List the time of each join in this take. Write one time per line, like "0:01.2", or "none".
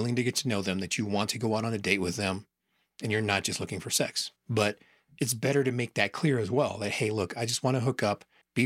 0:04.4